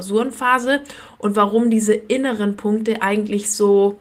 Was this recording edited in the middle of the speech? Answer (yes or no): no